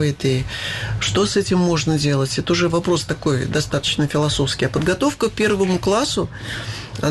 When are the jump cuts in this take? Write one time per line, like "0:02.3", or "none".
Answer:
none